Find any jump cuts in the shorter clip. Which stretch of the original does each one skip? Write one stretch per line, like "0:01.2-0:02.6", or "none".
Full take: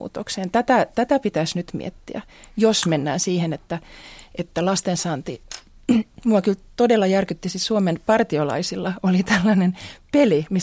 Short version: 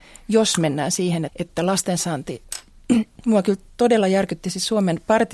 0:03.5-0:04.3

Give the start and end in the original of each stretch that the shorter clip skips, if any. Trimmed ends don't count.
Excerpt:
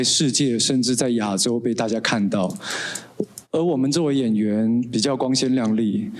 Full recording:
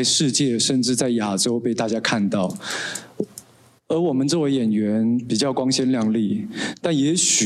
0:03.4-0:03.8

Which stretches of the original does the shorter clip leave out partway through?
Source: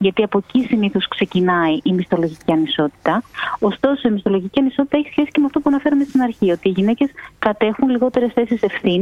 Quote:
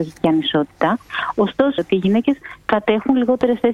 0:04.0-0:06.5

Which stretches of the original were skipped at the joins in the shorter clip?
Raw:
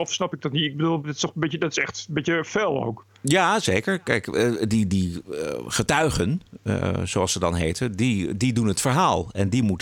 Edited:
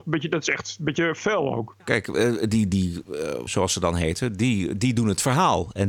0:03.1-0:04.0
0:05.7-0:07.1

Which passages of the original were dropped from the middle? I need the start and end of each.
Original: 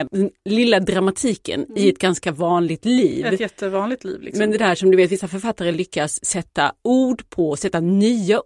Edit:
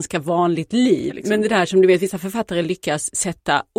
0:03.2-0:04.2

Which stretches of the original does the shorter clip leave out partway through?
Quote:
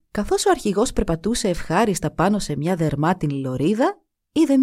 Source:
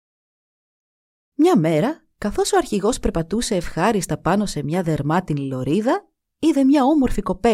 none

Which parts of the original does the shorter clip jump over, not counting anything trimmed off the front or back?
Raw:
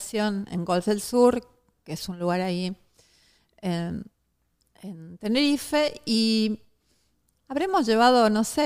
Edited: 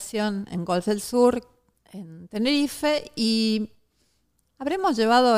0:01.7-0:04.6

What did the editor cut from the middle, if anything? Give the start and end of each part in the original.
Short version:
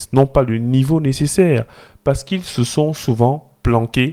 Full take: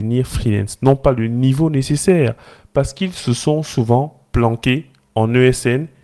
none

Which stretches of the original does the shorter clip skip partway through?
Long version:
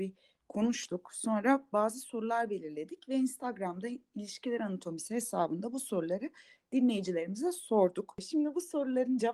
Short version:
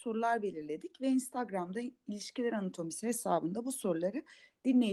none

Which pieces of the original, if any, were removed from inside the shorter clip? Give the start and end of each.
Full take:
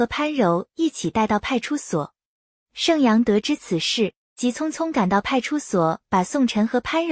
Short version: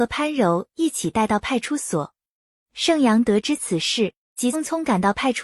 0:04.5-0:04.6

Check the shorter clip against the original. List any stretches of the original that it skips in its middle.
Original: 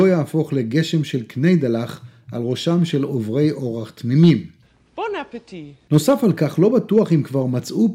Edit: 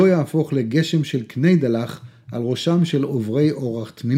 none

